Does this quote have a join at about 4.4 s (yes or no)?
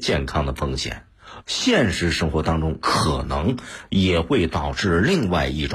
no